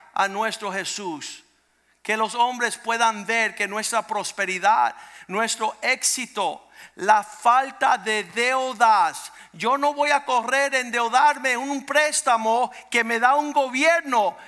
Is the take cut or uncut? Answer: uncut